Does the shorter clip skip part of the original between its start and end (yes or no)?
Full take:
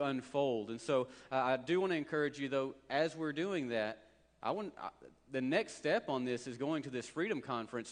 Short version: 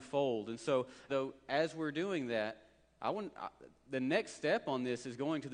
yes